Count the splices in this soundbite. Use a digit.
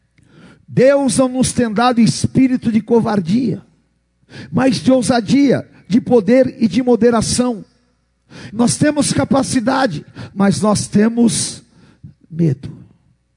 2